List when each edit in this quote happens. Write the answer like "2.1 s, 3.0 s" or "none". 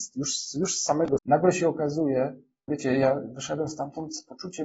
1.2 s, 2.7 s